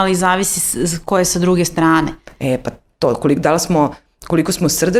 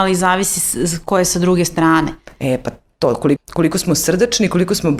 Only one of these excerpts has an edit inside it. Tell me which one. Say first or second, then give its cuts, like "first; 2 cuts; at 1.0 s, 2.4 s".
second; 1 cut; at 3.4 s